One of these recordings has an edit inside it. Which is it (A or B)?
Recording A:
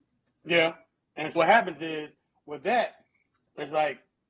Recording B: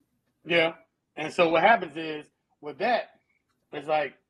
A